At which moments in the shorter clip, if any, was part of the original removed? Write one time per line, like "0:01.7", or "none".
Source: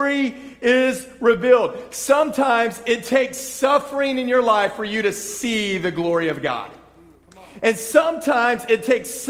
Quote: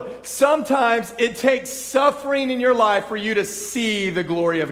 none